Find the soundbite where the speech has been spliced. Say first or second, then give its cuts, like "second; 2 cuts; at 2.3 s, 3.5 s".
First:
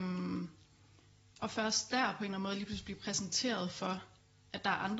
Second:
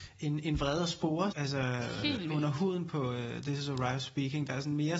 second; 1 cut; at 1.3 s